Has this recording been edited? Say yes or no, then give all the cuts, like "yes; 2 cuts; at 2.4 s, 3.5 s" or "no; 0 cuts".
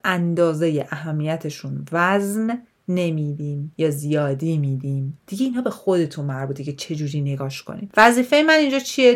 no; 0 cuts